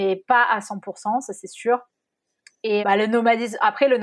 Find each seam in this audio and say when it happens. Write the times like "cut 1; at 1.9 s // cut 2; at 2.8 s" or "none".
cut 1; at 2.8 s